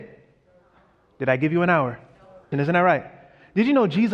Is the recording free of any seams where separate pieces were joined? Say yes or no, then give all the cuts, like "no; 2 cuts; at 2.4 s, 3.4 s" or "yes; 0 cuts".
no; 1 cut; at 2.5 s